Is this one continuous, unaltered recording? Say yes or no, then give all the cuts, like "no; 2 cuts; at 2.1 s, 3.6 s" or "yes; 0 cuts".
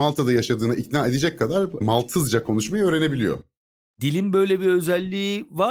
yes; 0 cuts